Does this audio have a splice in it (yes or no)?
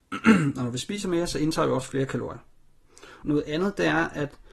yes